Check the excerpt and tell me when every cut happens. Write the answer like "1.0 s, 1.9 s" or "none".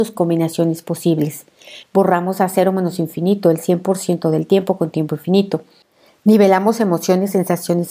none